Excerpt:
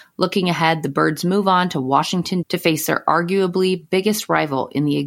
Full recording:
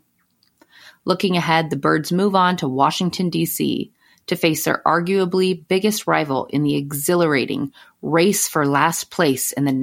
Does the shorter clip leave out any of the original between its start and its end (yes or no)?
yes